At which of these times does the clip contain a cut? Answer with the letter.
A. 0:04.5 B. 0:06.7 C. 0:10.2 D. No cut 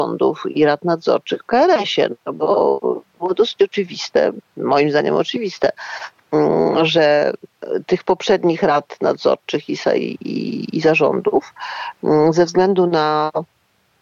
D